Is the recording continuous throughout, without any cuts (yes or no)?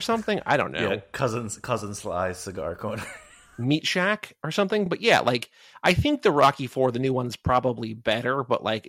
yes